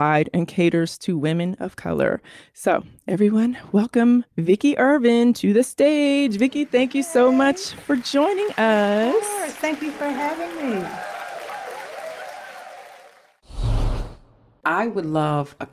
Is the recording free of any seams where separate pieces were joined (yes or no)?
no